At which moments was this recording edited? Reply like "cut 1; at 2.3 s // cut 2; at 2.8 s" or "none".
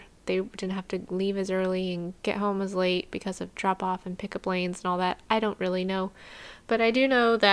none

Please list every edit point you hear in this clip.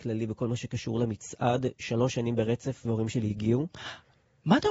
cut 1; at 2.8 s

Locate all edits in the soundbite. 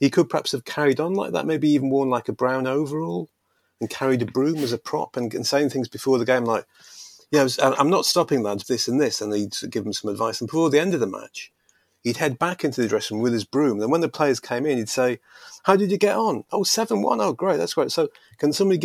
cut 1; at 8.6 s

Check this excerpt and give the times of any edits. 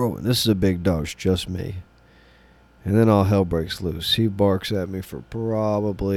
cut 1; at 1.0 s

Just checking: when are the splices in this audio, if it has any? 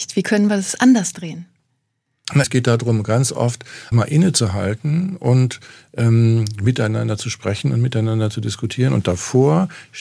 cut 1; at 2.4 s // cut 2; at 3.9 s

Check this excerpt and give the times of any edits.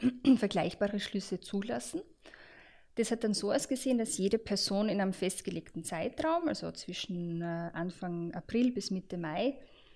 none

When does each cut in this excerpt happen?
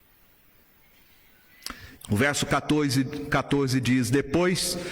cut 1; at 2.0 s

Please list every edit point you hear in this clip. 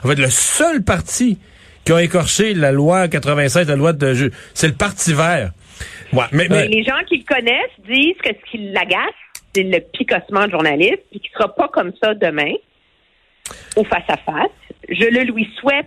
cut 1; at 6.0 s

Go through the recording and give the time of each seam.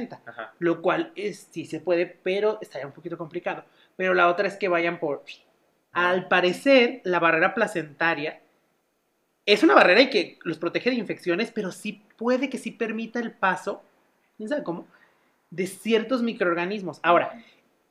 cut 1; at 5.9 s

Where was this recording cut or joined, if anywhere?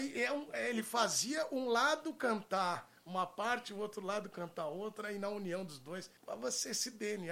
cut 1; at 6.2 s

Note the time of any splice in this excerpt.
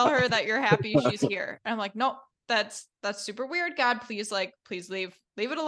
none

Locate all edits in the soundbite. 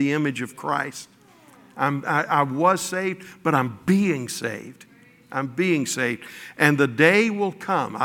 none

